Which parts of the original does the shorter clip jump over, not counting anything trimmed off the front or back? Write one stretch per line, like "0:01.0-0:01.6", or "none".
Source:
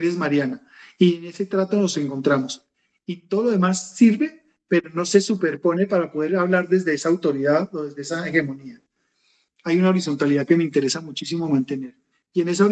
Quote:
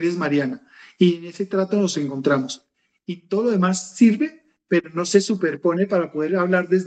none